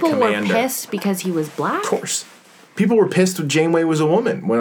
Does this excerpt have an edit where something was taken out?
yes; 1 cut; at 2.7 s

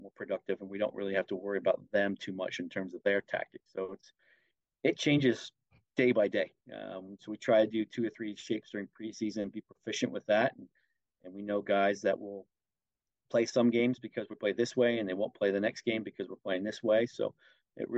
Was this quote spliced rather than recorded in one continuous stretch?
no; 0 cuts

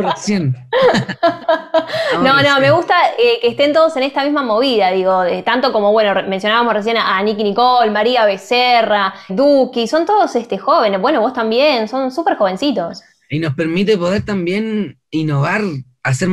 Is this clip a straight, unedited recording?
no; 1 cut; at 9.3 s

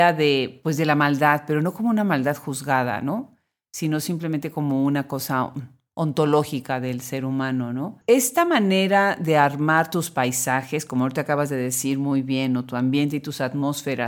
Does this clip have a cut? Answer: yes; 1 cut; at 8.0 s

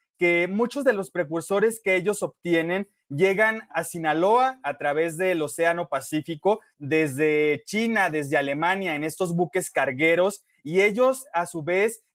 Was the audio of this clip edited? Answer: yes; 1 cut; at 6.7 s

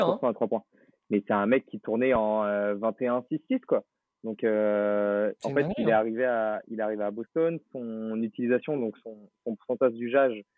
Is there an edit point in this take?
no; 0 cuts

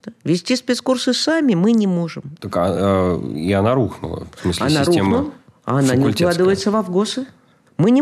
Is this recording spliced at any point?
yes; 1 cut; at 2.4 s

